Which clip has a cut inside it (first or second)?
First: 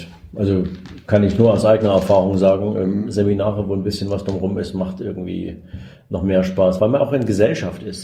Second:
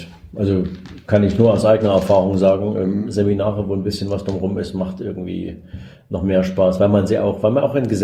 first